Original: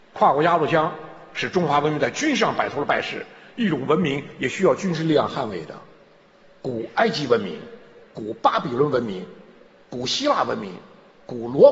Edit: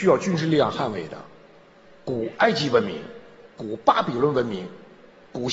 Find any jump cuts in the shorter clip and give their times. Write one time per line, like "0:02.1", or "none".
none